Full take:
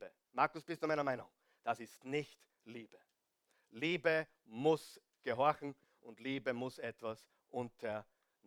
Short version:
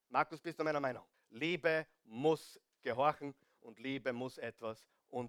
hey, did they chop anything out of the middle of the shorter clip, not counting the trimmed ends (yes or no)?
yes